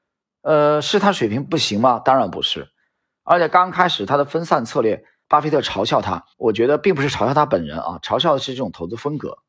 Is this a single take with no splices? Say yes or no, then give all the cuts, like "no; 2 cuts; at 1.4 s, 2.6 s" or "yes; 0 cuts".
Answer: no; 2 cuts; at 5.2 s, 6.3 s